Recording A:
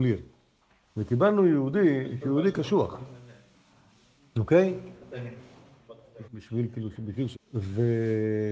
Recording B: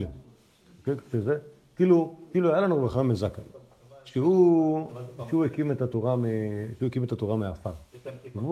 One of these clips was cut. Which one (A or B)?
A